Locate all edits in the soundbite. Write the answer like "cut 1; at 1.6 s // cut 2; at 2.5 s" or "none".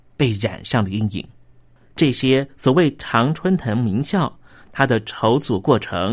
cut 1; at 1.9 s // cut 2; at 4.6 s